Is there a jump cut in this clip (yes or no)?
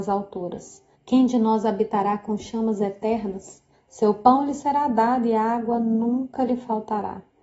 yes